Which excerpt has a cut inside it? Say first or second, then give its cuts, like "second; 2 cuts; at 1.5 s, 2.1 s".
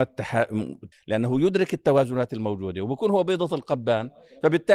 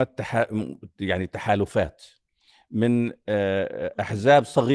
first; 1 cut; at 0.9 s